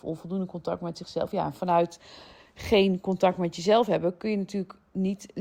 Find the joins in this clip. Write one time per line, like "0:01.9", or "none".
none

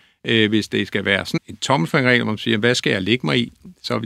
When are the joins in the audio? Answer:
0:01.4

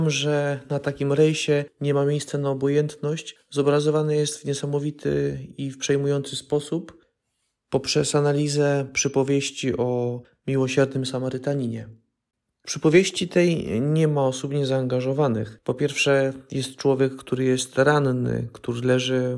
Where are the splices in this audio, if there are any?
none

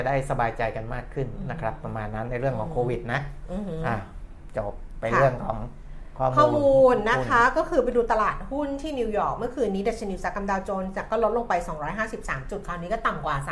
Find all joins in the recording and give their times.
none

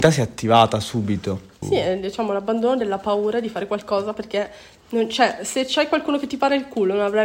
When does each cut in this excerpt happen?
0:01.6

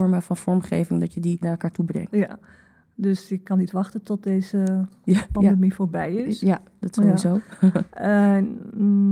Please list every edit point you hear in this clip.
none

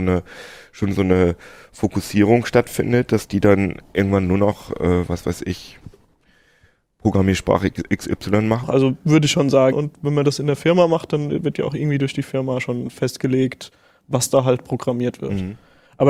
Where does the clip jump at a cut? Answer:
0:08.6
0:09.7

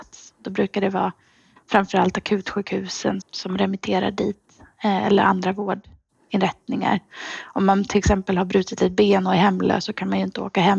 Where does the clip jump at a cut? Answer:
0:03.2

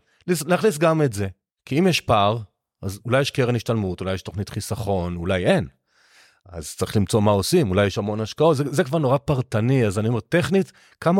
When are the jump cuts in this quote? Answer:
0:01.6

